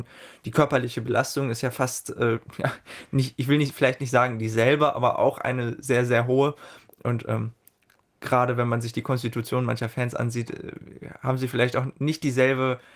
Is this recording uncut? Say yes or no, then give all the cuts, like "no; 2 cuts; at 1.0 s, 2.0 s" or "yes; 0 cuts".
yes; 0 cuts